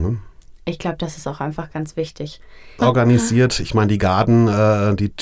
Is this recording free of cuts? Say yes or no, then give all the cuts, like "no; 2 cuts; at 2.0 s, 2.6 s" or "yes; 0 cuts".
no; 1 cut; at 2.8 s